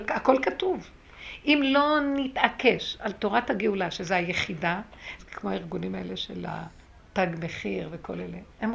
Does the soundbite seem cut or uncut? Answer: cut